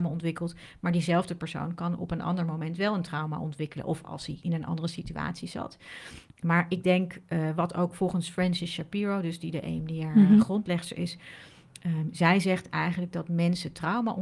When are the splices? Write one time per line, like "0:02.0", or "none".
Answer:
none

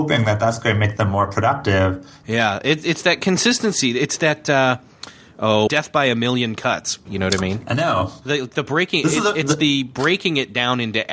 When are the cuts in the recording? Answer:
0:02.2
0:05.7
0:07.1

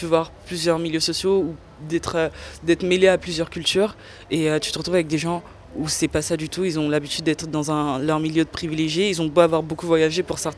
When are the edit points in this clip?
none

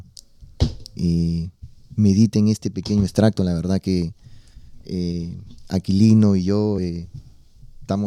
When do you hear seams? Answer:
none

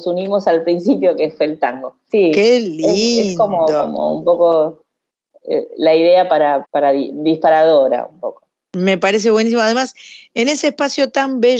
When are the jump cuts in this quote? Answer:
0:02.1
0:06.6

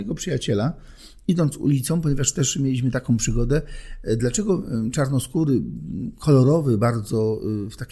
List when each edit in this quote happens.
none

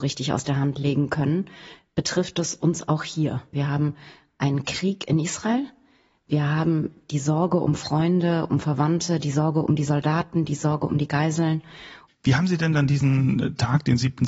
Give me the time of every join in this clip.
0:03.5
0:12.1

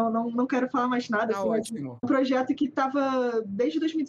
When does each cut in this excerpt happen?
none

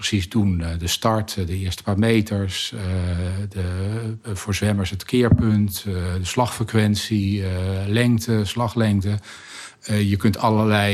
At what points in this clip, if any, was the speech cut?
none

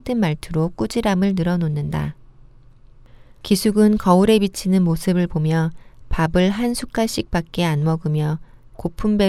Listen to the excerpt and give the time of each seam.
0:03.3

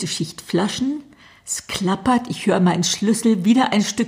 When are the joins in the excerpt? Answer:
none

